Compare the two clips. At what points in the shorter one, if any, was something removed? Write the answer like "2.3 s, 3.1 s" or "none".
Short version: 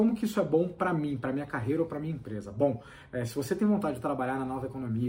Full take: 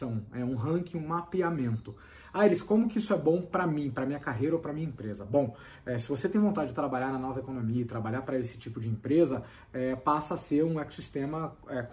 none

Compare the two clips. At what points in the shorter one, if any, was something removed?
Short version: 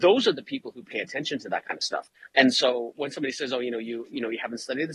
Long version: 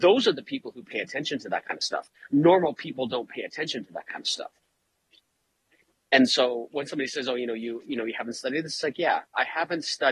2.3 s

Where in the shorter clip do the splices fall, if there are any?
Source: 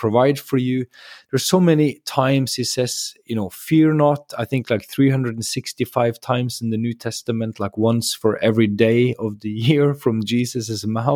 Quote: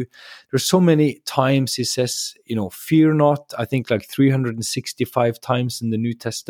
none

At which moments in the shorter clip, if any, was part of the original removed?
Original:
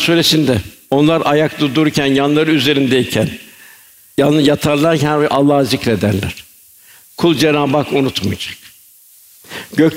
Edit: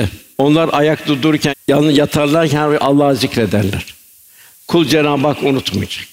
1.5 s

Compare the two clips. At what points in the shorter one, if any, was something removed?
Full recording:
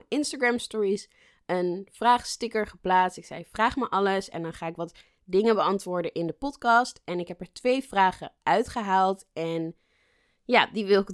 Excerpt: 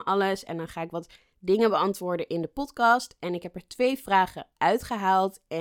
none

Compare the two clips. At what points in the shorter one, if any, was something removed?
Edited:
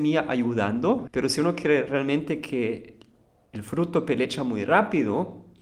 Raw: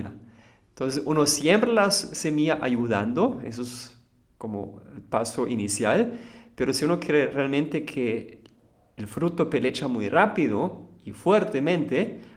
1.1 s

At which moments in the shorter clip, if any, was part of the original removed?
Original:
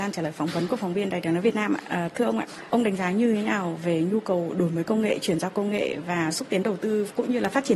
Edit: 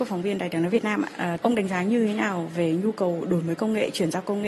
1.4 s

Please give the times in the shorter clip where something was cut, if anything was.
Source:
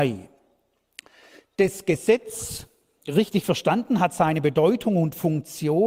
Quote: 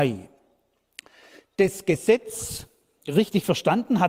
none

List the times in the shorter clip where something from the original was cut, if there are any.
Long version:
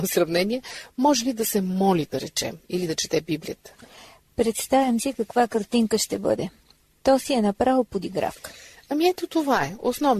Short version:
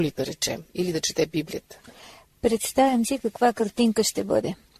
none

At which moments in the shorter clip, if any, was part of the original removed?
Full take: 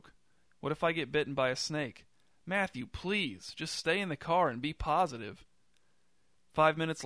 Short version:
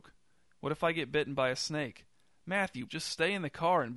2.9 s

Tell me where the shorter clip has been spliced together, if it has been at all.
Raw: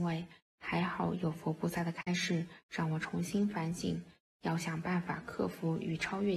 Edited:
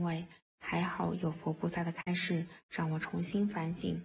none

